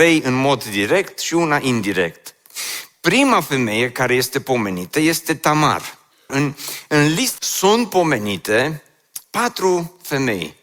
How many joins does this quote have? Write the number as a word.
three